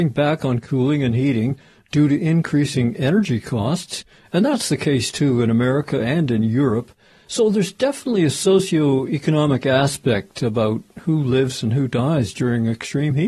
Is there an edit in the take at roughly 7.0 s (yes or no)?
no